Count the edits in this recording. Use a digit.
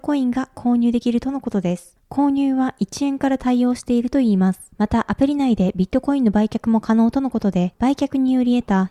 0